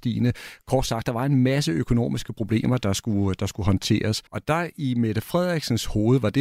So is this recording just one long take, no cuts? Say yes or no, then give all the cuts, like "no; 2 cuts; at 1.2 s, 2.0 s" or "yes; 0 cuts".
no; 1 cut; at 4.3 s